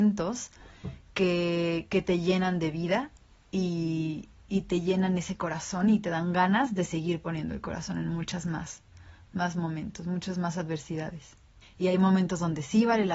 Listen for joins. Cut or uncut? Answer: cut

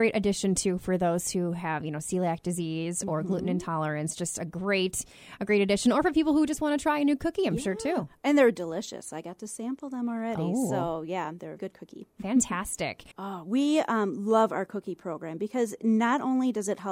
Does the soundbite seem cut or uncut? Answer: cut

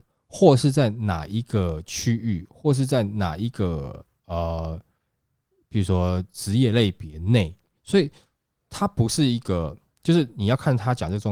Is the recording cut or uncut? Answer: cut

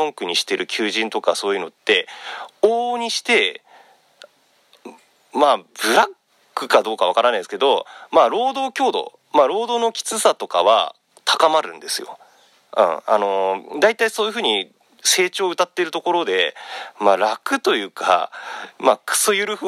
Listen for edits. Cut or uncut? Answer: uncut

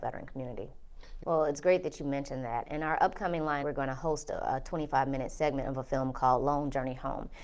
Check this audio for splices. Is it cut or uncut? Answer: cut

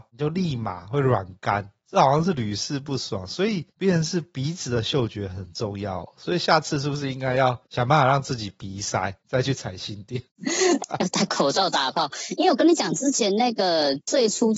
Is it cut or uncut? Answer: cut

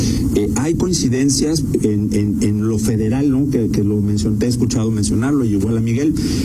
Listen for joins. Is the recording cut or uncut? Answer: uncut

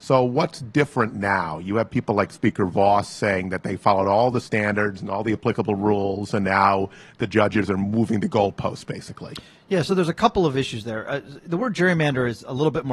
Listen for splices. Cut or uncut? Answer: uncut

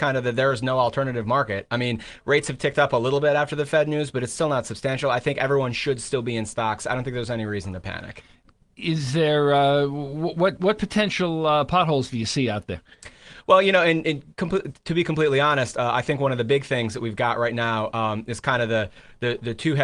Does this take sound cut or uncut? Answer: uncut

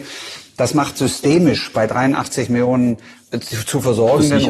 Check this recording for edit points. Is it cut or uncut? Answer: uncut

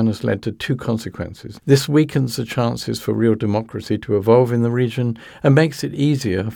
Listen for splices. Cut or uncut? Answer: cut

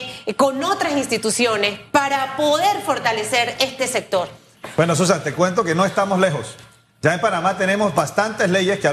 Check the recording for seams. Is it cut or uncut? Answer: uncut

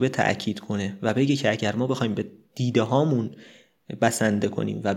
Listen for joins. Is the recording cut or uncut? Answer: uncut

